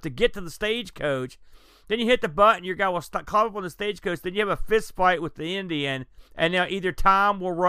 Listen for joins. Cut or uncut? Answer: cut